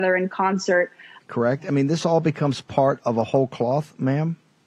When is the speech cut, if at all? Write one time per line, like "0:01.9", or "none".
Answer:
0:01.2